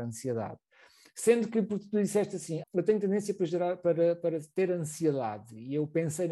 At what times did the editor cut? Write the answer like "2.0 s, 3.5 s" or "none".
2.6 s